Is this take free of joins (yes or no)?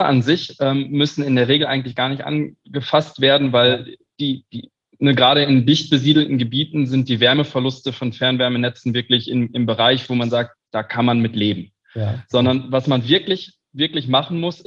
yes